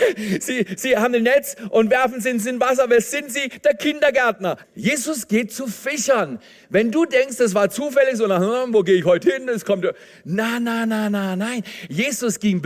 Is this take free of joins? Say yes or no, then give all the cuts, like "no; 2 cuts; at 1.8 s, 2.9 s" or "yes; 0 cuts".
no; 1 cut; at 4.6 s